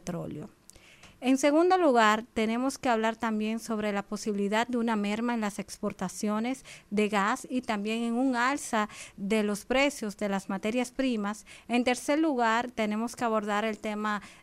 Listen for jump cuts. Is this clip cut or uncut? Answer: uncut